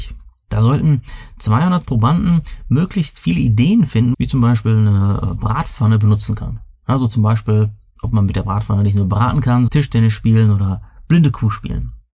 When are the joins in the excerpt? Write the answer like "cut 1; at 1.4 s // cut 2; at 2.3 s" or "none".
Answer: cut 1; at 4.1 s // cut 2; at 9.7 s